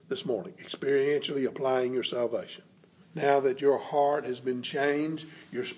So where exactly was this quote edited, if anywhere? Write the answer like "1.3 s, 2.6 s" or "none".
3.0 s